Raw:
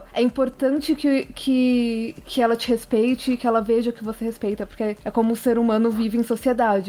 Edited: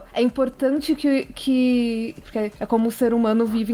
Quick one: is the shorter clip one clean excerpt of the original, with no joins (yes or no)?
no